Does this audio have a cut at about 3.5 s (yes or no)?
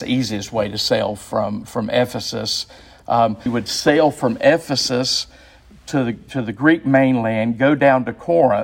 yes